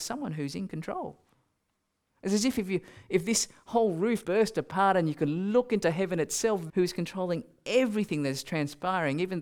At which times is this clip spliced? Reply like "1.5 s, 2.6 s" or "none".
4.2 s, 6.7 s

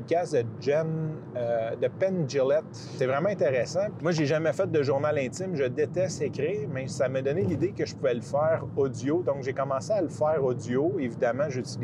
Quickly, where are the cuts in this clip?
4.0 s

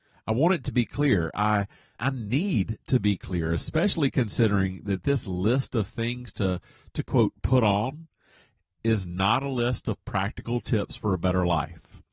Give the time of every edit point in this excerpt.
1.9 s

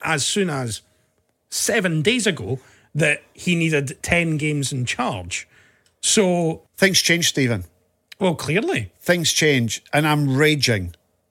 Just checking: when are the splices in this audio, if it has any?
6.7 s

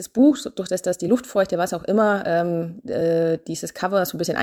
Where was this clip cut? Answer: none

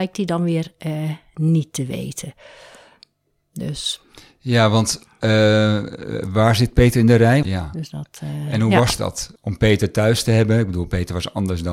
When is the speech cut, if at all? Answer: 7.4 s, 9.4 s

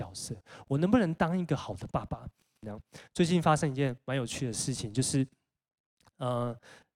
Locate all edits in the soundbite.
2.6 s

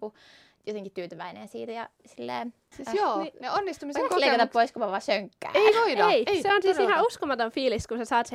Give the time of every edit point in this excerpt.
none

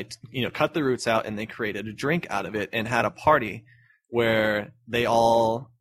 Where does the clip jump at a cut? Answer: 4.8 s

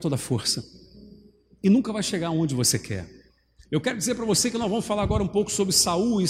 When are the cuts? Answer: 3.7 s

